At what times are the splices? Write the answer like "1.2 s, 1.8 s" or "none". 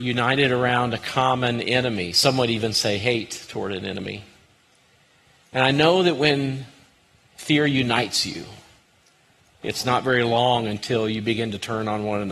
none